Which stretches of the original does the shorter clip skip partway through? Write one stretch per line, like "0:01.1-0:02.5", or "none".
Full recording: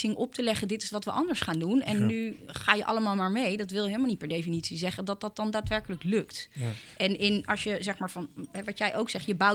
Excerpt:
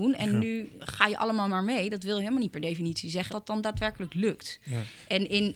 0:05.0-0:05.2